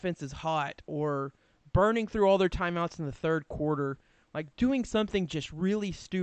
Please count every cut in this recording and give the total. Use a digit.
0